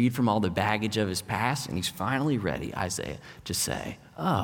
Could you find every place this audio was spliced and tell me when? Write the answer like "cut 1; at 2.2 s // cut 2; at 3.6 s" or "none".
none